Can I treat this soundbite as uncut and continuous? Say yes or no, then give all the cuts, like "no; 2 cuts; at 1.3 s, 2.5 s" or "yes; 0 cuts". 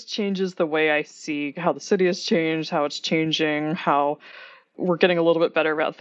yes; 0 cuts